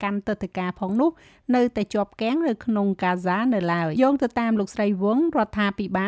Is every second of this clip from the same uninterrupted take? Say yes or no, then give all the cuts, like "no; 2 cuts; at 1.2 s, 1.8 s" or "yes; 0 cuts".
no; 1 cut; at 4.0 s